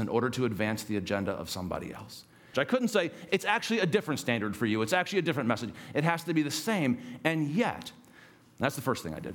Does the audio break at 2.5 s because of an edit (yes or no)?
yes